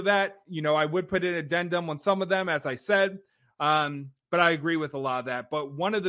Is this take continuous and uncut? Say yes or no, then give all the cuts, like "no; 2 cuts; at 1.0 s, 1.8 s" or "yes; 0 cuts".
yes; 0 cuts